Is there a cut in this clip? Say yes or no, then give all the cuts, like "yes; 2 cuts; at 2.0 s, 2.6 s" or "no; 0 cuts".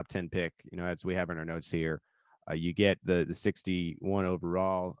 no; 0 cuts